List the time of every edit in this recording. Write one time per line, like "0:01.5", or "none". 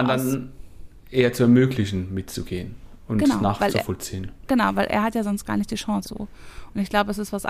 0:06.0